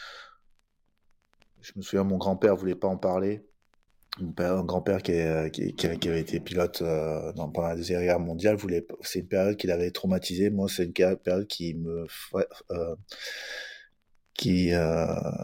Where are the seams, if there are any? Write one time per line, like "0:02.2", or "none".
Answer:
none